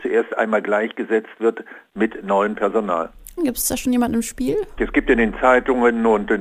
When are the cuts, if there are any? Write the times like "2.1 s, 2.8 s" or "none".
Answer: 3.4 s, 4.8 s